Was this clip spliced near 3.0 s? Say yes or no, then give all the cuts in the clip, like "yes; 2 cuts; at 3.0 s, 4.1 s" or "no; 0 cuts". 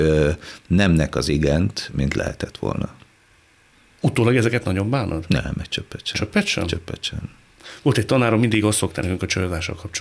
no; 0 cuts